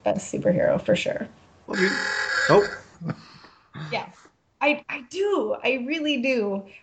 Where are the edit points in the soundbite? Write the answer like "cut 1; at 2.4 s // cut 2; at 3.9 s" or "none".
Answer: cut 1; at 1.7 s // cut 2; at 2.9 s